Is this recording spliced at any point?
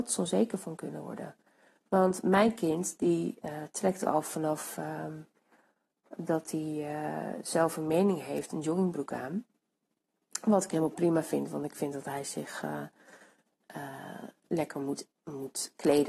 no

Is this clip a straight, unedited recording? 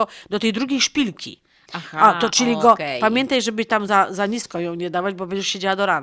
yes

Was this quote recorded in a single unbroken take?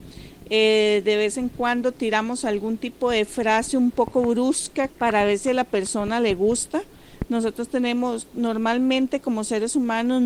no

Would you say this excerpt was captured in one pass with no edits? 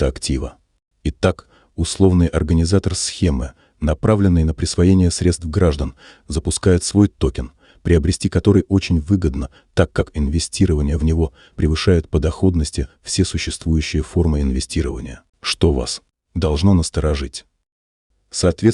no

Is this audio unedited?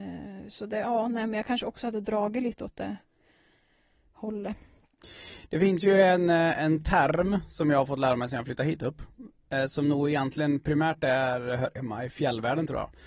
yes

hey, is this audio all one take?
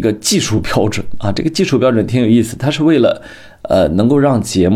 yes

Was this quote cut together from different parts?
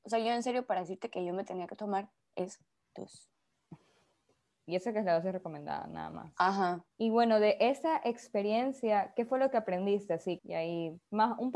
yes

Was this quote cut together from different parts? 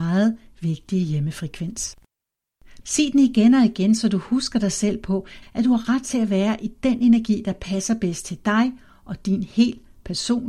yes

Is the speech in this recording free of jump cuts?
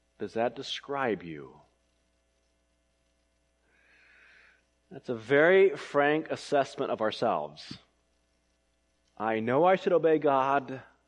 yes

